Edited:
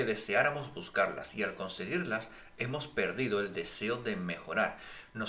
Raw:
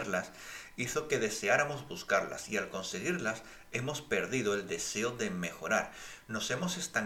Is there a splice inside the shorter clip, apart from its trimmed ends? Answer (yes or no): no